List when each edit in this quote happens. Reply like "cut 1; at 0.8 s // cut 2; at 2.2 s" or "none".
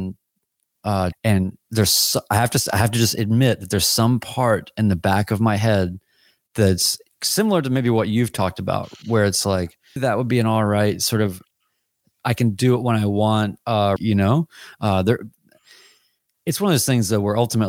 cut 1; at 1.1 s // cut 2; at 10.0 s // cut 3; at 14.0 s

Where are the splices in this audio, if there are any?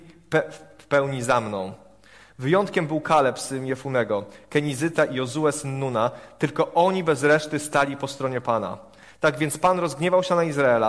none

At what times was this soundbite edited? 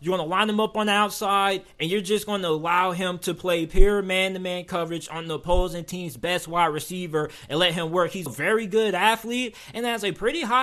cut 1; at 8.3 s

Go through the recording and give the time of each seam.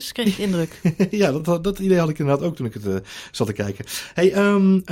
none

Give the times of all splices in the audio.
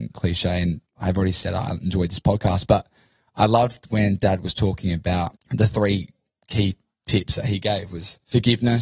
none

